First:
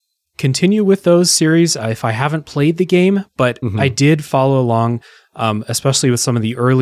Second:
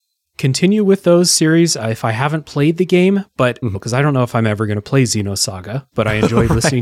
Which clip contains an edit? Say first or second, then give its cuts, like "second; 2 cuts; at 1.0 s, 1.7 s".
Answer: second; 1 cut; at 3.7 s